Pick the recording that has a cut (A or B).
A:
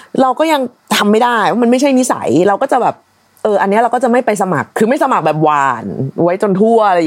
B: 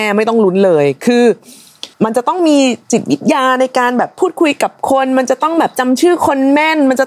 B